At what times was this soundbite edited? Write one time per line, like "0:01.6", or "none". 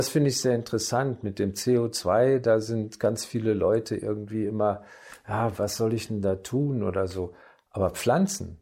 0:05.6